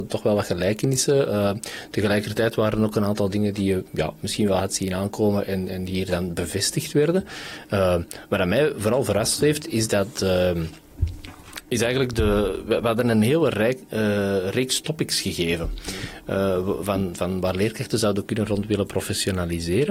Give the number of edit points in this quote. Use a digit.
0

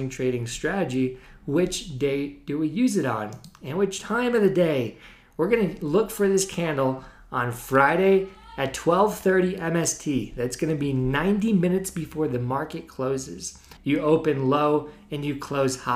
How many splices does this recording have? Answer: 1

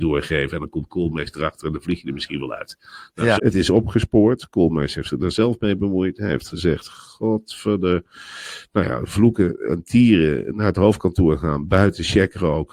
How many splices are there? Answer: 1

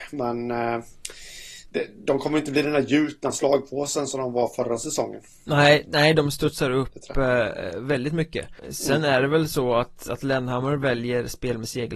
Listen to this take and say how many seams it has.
1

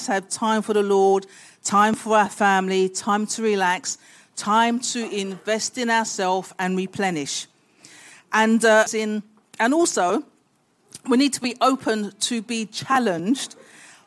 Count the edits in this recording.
1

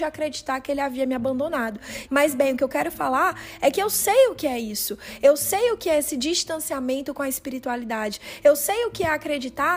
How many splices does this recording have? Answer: 1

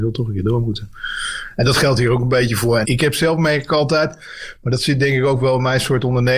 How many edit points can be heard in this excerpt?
1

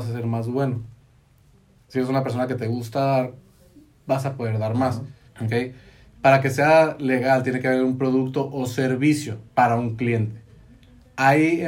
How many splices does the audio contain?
2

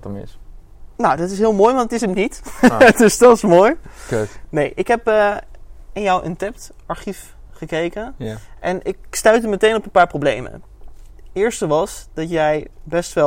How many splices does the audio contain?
0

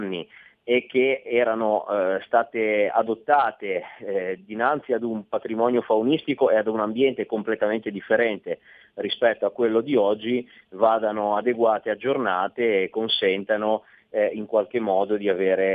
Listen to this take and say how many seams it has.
0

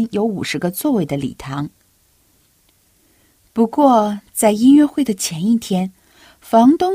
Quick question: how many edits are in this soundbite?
0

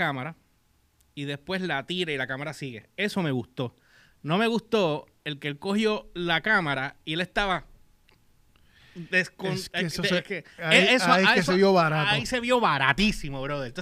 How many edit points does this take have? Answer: 0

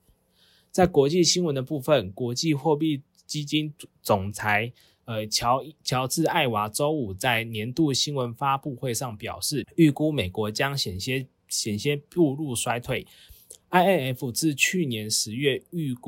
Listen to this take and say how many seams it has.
1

